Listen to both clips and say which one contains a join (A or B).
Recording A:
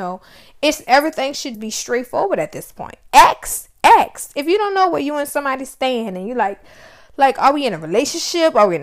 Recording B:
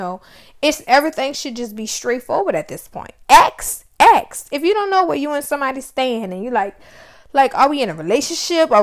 A